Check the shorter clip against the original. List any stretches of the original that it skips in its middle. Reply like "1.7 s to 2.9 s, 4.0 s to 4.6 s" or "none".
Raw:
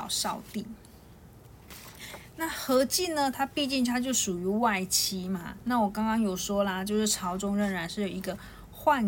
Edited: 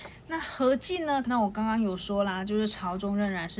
3.3 s to 5.6 s